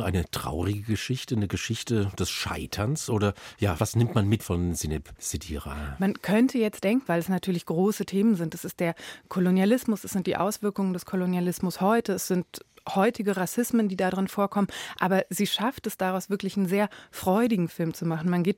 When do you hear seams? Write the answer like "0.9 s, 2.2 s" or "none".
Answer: 7.1 s

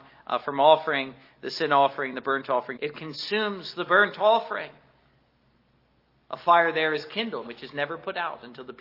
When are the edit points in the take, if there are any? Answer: 2.7 s, 7.4 s

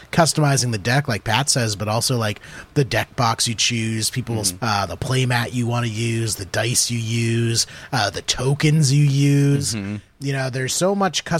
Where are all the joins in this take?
4.6 s

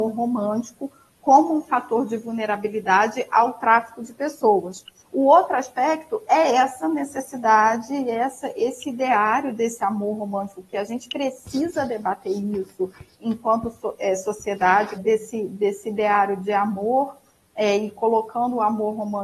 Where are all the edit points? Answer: 5.0 s, 15.0 s

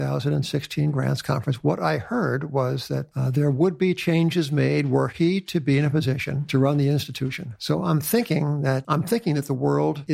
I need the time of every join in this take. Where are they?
3.1 s

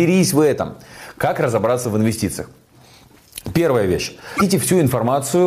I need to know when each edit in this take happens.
none

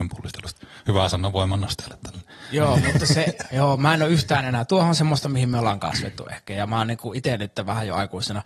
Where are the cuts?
none

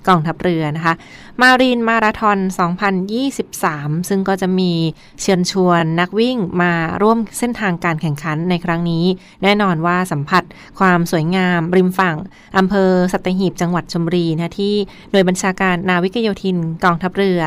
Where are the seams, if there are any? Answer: none

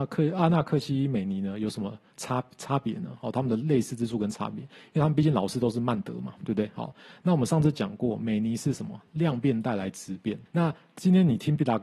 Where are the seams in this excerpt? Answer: 10.5 s

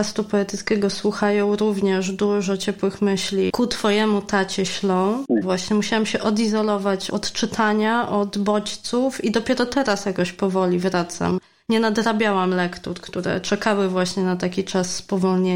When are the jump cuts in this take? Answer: 5.4 s

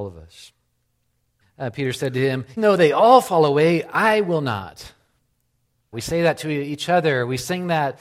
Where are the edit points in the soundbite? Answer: 1.4 s, 2.6 s, 5.9 s

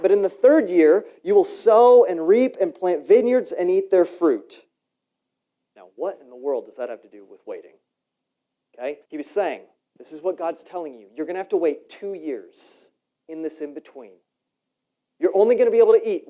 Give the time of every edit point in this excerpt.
9.0 s

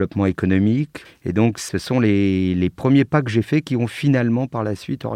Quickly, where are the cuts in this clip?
1.0 s

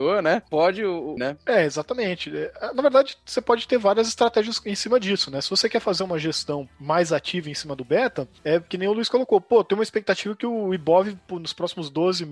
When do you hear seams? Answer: 1.2 s

